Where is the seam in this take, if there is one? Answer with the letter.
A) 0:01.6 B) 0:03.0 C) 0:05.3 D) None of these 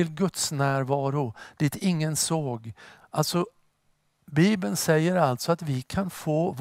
B